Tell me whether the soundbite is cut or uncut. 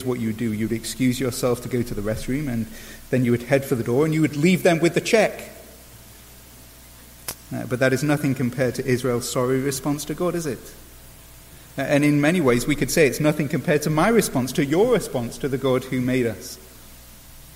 uncut